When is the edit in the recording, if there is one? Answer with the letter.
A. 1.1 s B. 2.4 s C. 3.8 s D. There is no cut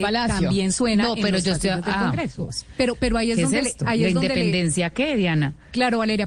B